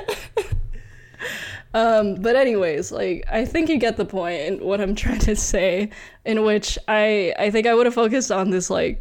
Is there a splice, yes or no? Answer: no